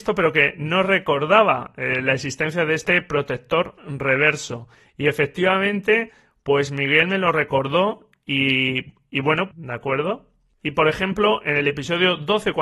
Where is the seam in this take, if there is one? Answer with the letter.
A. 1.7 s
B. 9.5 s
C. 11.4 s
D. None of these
B